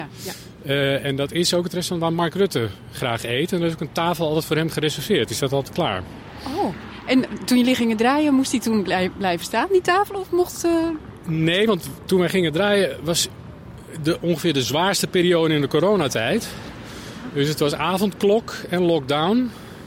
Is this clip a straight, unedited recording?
yes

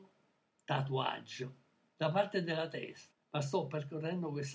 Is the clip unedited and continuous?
no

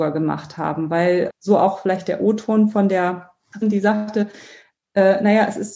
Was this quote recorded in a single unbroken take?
no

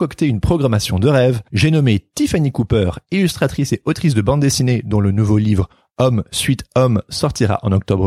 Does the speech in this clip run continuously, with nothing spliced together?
yes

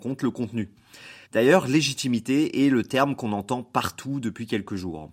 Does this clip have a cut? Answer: yes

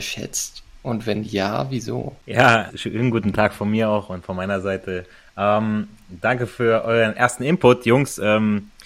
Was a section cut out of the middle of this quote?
yes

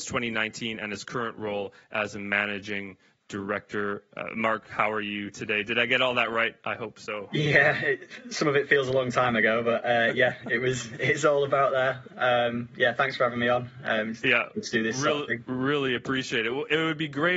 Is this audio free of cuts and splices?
yes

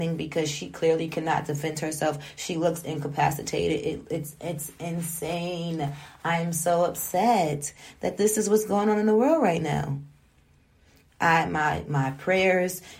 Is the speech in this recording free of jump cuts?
yes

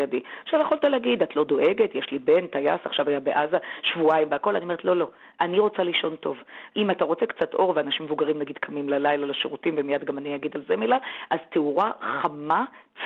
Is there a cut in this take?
yes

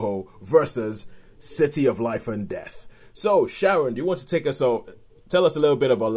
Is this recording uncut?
yes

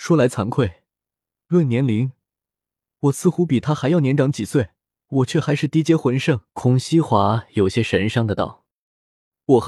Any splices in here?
yes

